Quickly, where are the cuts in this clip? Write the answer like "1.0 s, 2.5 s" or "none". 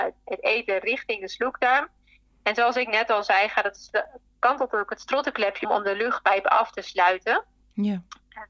5.6 s